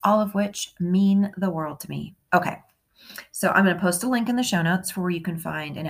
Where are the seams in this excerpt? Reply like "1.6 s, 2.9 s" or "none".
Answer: 2.3 s